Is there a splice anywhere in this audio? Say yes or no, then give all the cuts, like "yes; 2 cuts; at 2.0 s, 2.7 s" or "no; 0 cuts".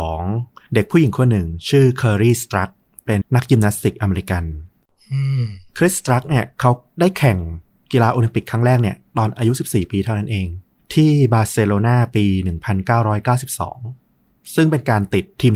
yes; 1 cut; at 3.2 s